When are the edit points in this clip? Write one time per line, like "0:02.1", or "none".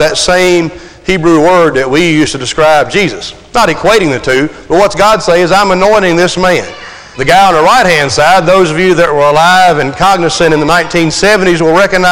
0:07.1